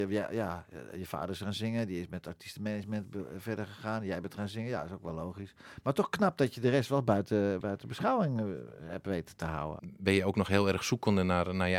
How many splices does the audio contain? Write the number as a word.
two